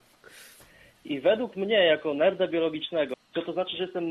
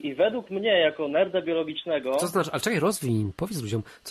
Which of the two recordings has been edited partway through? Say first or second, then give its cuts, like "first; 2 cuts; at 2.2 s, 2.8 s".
first; 2 cuts; at 1.1 s, 3.1 s